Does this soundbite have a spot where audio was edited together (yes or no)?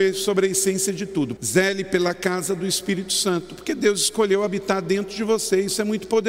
yes